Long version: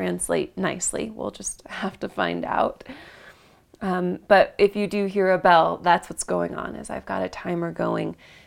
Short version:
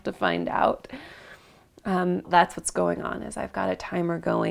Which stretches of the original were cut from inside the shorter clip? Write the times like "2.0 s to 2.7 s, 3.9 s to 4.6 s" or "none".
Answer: 4.2 s to 5.8 s